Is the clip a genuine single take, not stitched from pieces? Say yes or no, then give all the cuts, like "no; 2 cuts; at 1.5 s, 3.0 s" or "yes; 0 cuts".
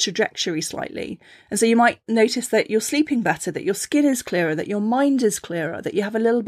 yes; 0 cuts